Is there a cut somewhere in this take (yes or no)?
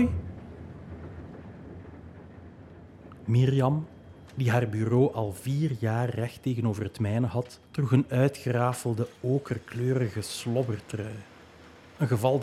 yes